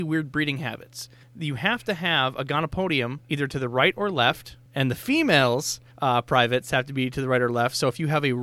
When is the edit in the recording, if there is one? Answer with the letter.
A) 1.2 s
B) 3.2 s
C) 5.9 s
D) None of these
B